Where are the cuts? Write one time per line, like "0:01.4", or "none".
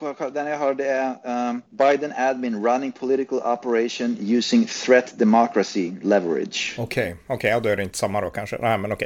0:01.7